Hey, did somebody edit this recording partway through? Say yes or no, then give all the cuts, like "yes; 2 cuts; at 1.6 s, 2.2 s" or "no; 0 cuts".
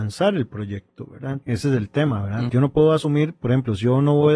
yes; 2 cuts; at 1.4 s, 2.5 s